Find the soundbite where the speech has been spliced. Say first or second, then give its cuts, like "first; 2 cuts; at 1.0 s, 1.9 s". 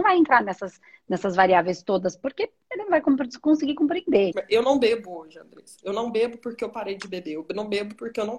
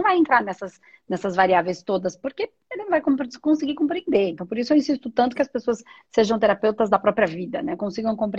first; 1 cut; at 4.3 s